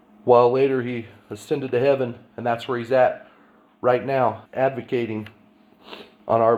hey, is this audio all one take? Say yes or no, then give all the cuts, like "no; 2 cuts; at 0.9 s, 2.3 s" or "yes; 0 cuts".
no; 1 cut; at 4.5 s